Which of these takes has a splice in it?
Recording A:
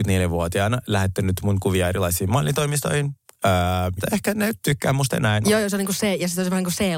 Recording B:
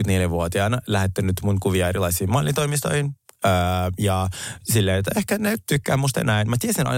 A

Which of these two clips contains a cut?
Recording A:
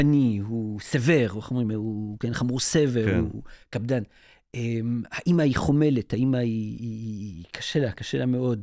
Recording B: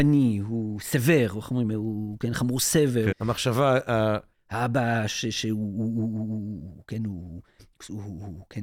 B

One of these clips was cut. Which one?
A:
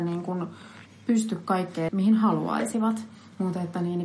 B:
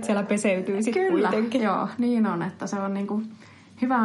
A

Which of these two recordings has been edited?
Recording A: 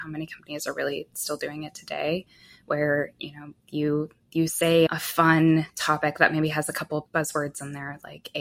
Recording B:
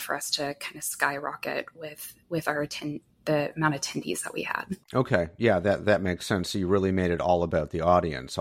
B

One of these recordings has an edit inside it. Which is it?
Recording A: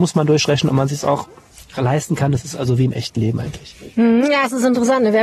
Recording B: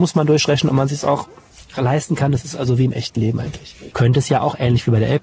B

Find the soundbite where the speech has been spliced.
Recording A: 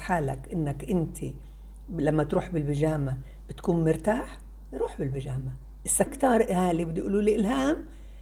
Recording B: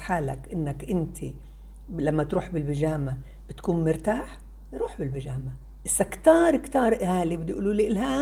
A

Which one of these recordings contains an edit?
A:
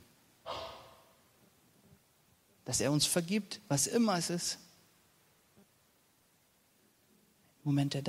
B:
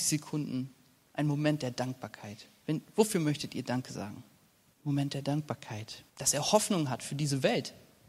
B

